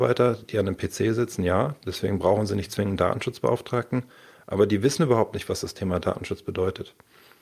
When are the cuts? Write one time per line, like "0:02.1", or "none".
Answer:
none